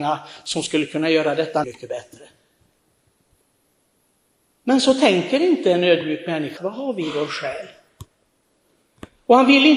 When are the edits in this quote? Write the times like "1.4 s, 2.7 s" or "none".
1.6 s, 6.6 s